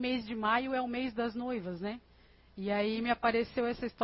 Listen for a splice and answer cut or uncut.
uncut